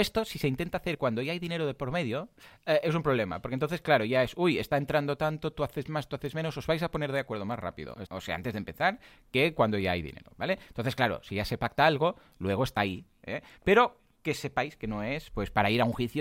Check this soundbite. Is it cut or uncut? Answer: cut